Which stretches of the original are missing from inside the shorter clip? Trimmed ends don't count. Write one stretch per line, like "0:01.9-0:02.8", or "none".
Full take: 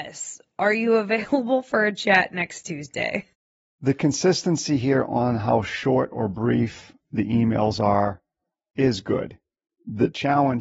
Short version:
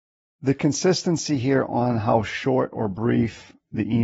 none